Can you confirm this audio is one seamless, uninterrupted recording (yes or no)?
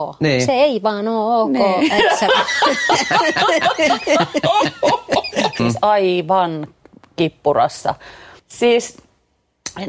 no